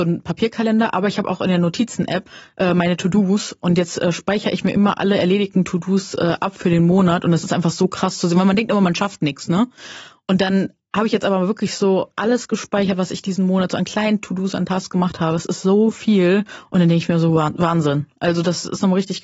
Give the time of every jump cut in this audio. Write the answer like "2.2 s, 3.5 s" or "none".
none